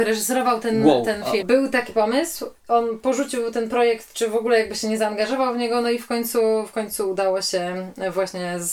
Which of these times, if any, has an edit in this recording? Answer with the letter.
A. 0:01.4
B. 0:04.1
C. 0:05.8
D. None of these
A